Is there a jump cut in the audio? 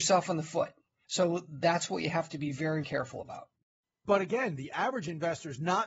yes; 1 cut; at 2.8 s

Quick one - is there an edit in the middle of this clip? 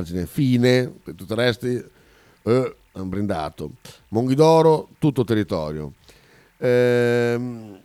yes; 1 cut; at 1.0 s

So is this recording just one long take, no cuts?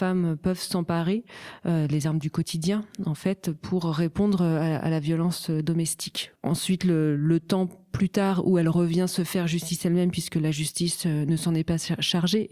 no; 1 cut; at 6.4 s

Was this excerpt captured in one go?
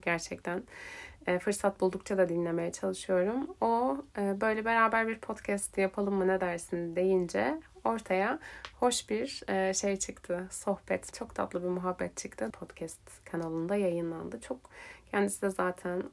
no; 2 cuts; at 11.1 s, 12.5 s

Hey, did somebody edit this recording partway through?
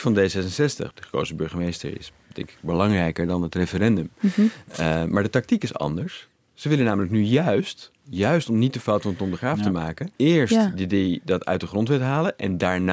yes; 2 cuts; at 0.9 s, 10.2 s

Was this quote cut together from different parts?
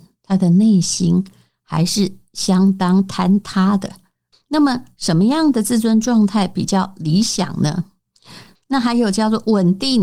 yes; 2 cuts; at 4.3 s, 8.5 s

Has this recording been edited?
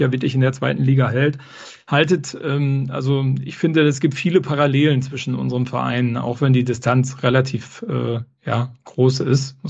no; 0 cuts

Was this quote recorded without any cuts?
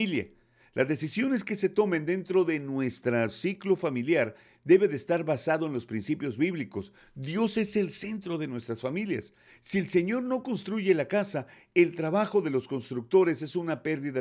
yes; 0 cuts

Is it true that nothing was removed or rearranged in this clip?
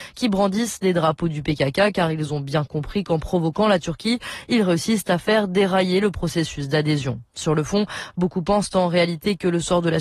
yes; 0 cuts

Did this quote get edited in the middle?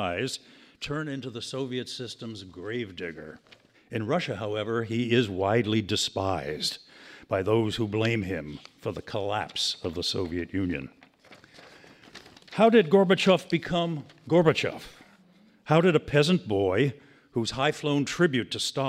yes; 1 cut; at 3.7 s

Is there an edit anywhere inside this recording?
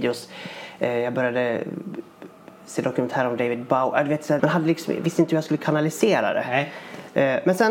yes; 1 cut; at 4.4 s

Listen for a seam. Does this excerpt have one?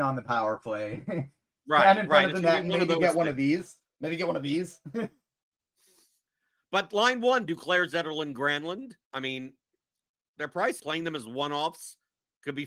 yes; 2 cuts; at 9.0 s, 10.8 s

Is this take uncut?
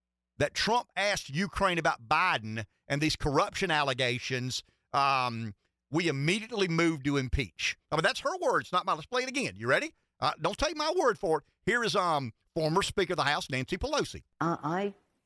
yes; 0 cuts

